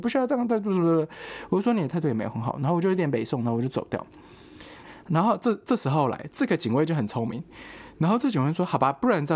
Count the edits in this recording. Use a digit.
1